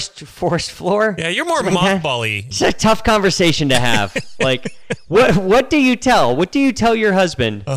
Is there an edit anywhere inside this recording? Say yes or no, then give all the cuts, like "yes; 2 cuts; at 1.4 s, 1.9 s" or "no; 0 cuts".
yes; 1 cut; at 2.5 s